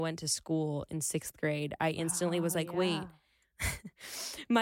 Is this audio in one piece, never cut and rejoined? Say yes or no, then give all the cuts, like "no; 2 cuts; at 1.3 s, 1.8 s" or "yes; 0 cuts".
yes; 0 cuts